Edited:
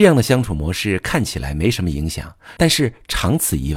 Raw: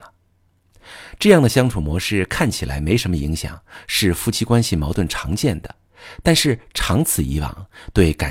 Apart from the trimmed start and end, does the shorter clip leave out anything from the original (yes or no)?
yes